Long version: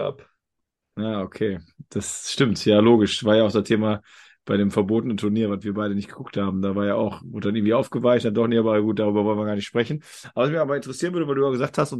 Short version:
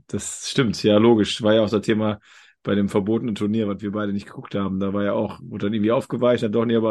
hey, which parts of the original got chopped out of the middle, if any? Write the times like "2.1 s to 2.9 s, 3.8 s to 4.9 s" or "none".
none